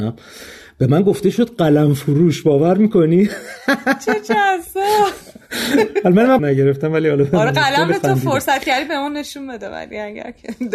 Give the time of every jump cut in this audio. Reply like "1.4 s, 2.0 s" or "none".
6.4 s